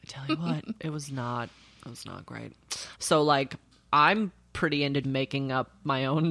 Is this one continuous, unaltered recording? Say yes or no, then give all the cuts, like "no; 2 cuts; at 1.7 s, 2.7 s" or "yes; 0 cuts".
no; 2 cuts; at 2.9 s, 5.0 s